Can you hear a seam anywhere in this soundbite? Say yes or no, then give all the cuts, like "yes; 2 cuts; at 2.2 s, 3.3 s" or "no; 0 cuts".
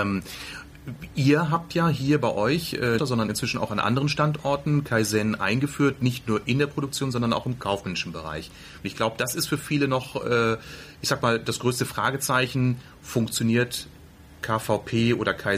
yes; 1 cut; at 3.0 s